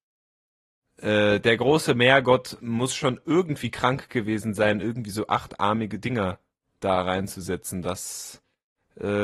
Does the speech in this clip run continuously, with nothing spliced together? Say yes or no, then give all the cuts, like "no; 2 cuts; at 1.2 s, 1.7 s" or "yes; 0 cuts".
yes; 0 cuts